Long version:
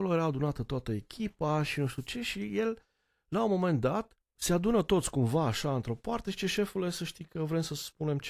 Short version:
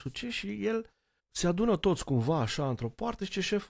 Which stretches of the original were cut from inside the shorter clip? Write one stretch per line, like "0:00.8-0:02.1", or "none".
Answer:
0:03.1-0:04.2